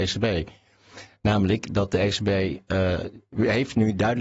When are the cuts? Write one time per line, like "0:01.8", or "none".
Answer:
none